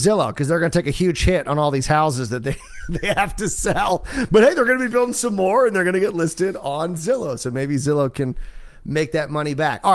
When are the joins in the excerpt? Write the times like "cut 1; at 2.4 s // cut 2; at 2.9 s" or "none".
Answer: none